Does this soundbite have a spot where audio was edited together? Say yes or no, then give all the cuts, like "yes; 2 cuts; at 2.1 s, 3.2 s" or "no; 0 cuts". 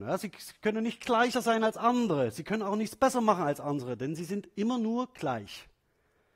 no; 0 cuts